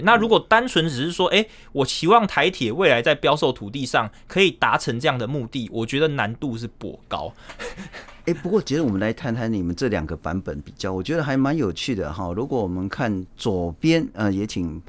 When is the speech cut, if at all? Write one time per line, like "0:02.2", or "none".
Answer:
none

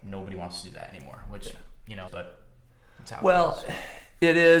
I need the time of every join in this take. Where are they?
0:02.1

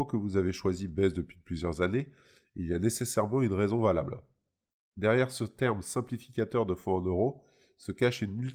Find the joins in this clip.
none

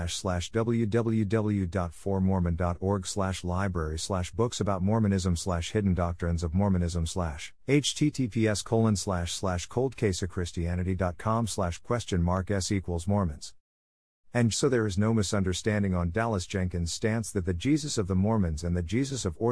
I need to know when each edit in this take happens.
0:07.6
0:14.5

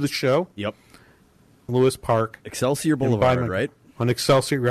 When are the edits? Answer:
0:01.7

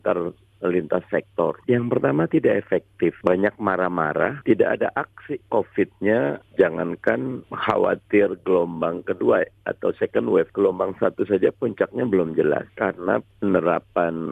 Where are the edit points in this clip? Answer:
0:01.6

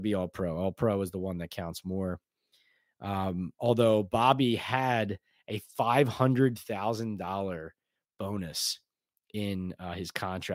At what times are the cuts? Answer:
none

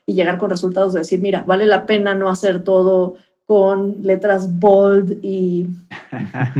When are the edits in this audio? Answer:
0:01.5

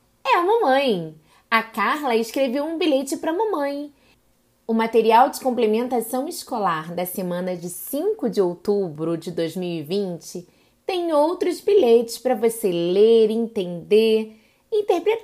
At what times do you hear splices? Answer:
0:04.7

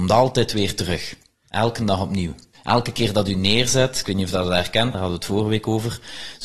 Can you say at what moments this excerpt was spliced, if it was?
0:02.5
0:04.9

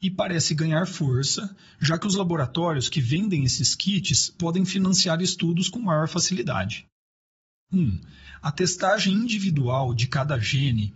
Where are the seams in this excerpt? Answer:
0:07.5

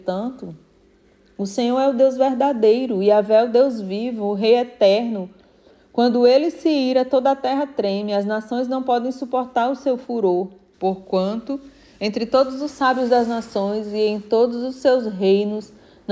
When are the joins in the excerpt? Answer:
0:10.7

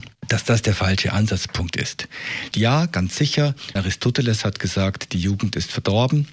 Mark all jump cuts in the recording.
0:02.5
0:03.8

